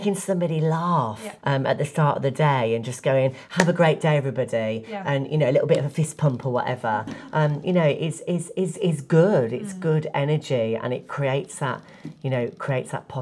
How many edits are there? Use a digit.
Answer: 1